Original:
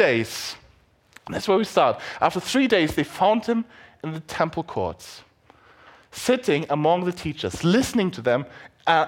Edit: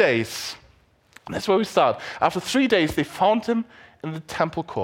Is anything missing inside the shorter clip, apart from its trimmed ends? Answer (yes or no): no